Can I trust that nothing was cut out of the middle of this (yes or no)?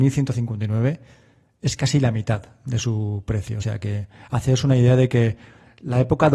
yes